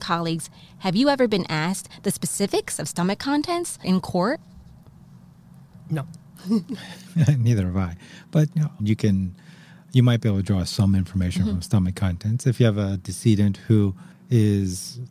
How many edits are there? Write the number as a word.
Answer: one